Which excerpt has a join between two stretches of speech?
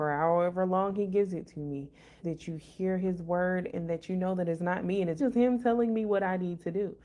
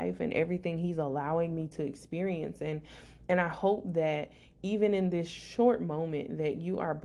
first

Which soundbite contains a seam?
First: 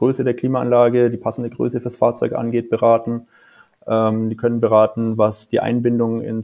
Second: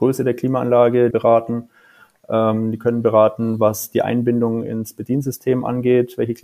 second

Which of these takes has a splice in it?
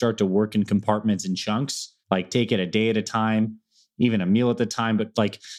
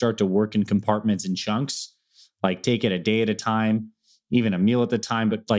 first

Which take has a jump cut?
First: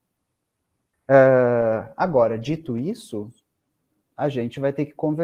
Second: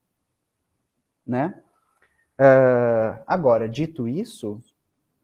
first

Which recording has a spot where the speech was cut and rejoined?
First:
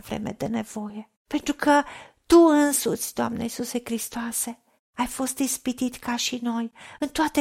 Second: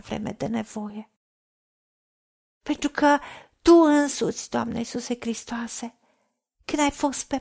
first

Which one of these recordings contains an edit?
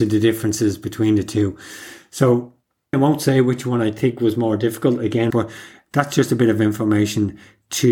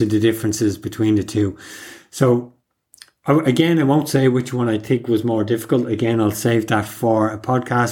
first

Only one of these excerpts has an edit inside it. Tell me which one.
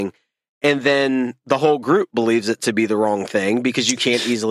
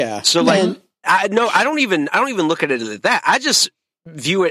second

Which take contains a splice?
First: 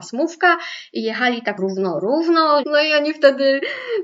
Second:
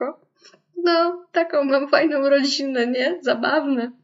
first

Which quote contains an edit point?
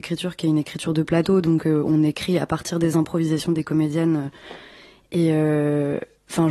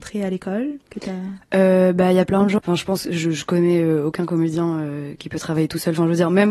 second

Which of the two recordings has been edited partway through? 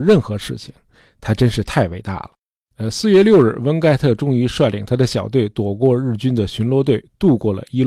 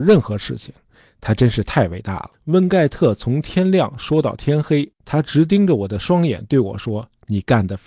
second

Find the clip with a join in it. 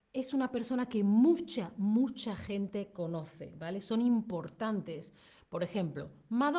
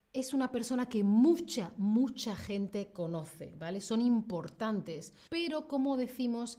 second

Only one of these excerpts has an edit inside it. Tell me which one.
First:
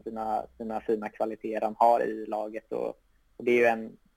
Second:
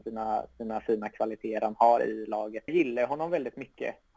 second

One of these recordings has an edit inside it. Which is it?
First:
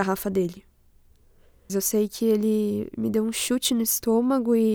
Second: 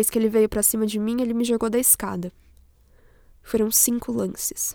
first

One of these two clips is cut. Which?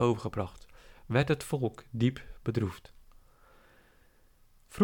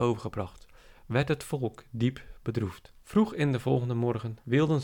second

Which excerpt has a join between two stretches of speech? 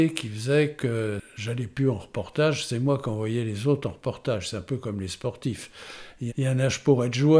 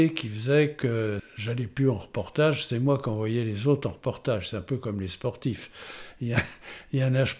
first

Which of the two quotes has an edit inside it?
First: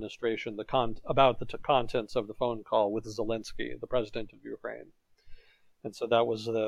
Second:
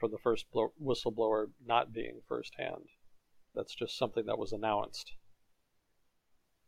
second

